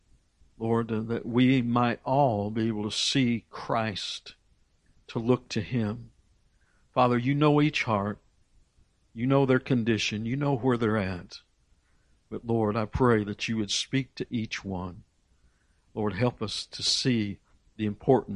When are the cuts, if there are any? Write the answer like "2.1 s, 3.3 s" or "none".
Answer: none